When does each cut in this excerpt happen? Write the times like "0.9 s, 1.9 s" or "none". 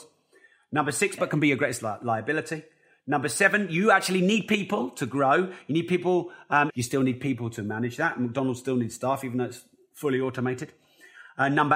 1.2 s, 6.7 s

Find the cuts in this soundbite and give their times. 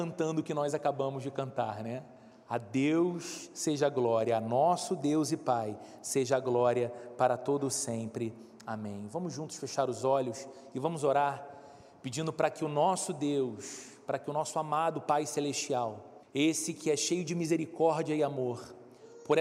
16.2 s

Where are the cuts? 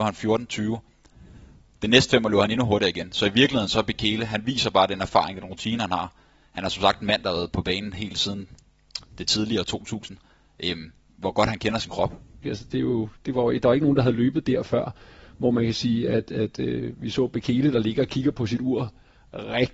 12.4 s

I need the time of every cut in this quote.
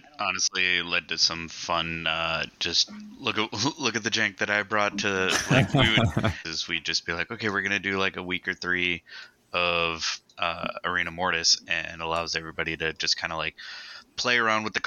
6.4 s

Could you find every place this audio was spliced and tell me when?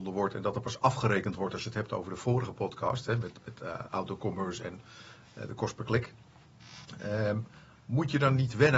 none

